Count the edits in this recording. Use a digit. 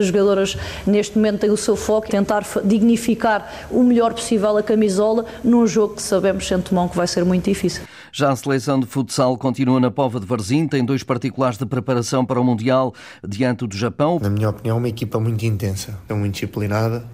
3